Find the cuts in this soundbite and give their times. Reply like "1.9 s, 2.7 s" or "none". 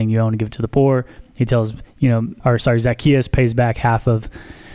2.4 s